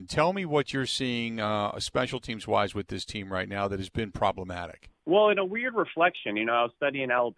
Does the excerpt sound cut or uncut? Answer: cut